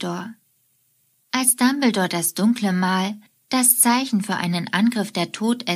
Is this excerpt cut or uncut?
cut